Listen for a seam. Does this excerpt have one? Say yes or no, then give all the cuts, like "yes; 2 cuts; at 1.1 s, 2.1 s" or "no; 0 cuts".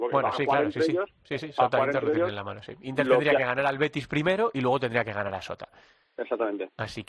no; 0 cuts